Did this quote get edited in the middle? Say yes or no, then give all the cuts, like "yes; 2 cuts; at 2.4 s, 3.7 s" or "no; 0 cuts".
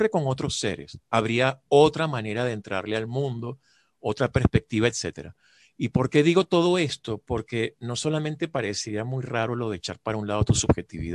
no; 0 cuts